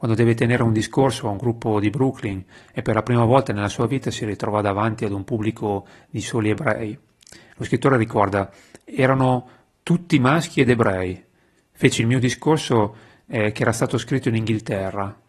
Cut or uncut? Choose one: uncut